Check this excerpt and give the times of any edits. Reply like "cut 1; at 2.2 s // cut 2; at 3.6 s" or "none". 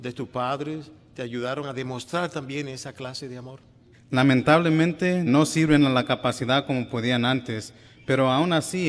cut 1; at 3.9 s // cut 2; at 5.3 s